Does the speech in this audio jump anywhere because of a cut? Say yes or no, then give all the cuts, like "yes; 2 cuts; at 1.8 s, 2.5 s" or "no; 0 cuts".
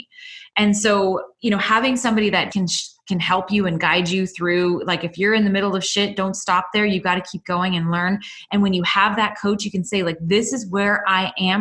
yes; 1 cut; at 2.5 s